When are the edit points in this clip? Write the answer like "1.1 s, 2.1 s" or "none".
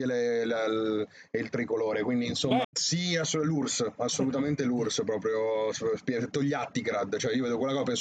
2.6 s